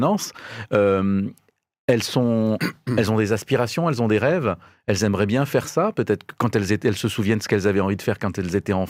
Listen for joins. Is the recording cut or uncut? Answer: uncut